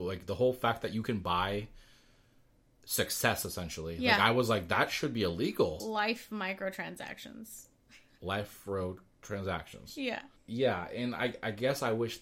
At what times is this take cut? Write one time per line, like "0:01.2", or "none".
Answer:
0:05.8